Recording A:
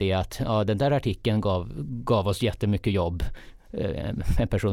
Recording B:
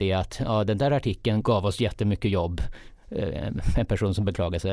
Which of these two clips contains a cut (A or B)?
B